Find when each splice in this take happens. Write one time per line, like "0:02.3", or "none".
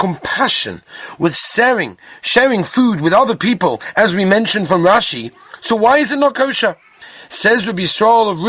none

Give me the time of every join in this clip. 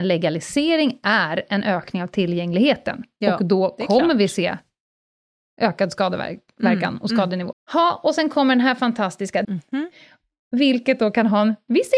0:07.5
0:09.4

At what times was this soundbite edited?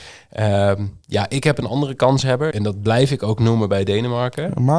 0:02.5

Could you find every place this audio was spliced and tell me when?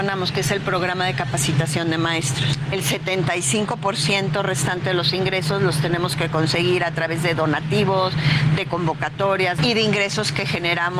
0:02.7
0:09.6

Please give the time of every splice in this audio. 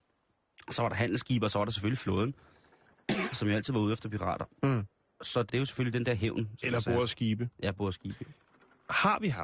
0:05.5

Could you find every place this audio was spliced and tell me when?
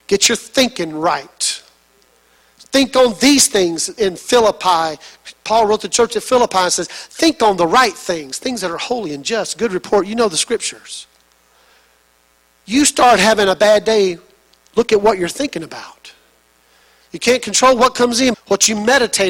0:18.3

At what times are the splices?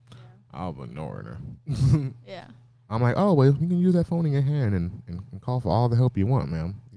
none

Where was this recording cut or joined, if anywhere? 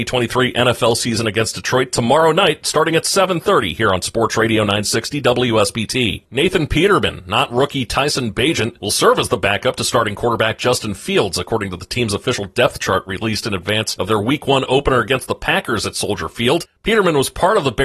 0:06.2

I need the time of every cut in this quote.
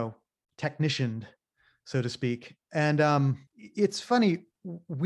0:03.5

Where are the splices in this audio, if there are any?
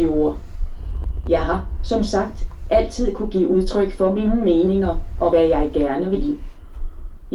0:01.3

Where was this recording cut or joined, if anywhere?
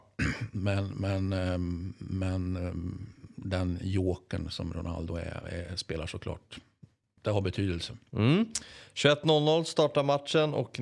none

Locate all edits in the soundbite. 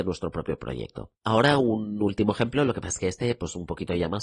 0:01.2

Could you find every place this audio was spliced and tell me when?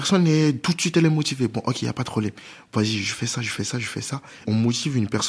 none

